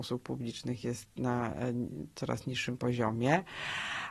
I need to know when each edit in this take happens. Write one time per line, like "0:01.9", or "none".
none